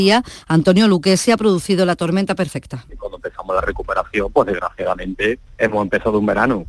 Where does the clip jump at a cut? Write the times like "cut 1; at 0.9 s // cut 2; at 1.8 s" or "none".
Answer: cut 1; at 2.9 s